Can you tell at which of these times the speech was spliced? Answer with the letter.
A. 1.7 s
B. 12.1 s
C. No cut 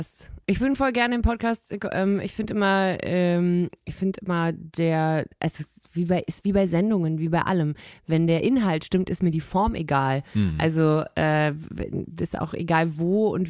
C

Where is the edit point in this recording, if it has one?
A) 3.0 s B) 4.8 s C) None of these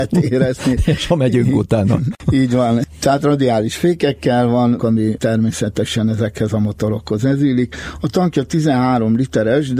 B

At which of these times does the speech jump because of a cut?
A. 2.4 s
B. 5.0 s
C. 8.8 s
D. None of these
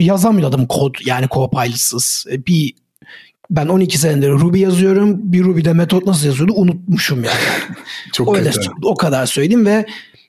C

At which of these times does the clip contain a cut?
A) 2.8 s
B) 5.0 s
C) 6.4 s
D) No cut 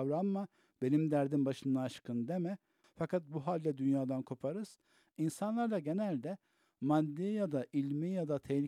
A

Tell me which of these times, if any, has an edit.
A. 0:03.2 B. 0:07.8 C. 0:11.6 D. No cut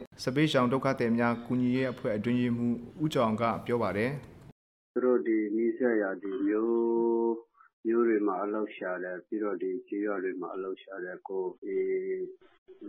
C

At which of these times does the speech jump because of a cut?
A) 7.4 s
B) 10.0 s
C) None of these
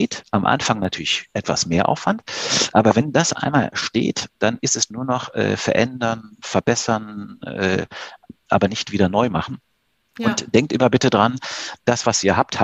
C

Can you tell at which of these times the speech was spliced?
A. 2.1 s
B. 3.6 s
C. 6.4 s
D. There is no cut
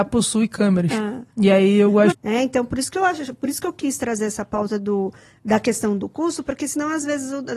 A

